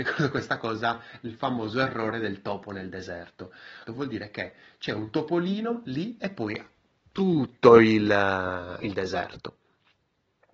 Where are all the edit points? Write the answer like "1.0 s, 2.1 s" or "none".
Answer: 3.9 s, 8.8 s